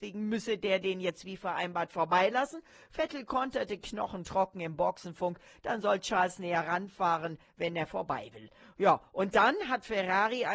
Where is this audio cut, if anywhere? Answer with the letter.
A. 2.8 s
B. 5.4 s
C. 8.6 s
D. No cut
D